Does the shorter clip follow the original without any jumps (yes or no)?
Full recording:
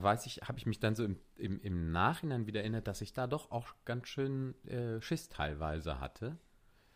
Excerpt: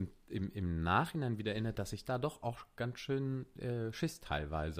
yes